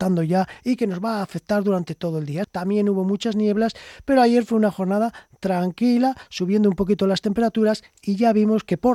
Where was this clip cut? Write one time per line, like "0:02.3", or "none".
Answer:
0:02.4